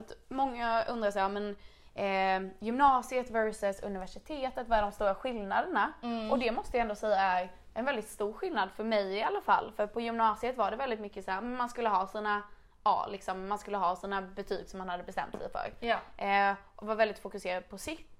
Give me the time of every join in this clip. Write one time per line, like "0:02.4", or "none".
none